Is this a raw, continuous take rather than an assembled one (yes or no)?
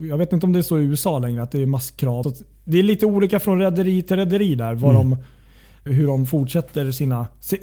no